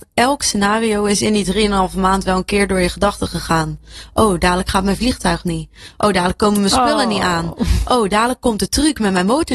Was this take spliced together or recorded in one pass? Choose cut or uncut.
uncut